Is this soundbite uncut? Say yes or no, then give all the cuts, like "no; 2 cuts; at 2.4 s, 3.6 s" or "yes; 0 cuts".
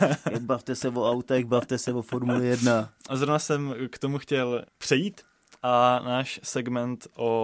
no; 1 cut; at 4.6 s